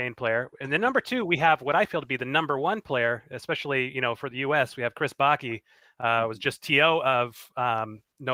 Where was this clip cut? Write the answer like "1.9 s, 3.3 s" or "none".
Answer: none